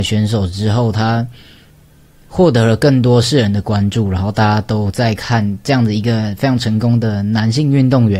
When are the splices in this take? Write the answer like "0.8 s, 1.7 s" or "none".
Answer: none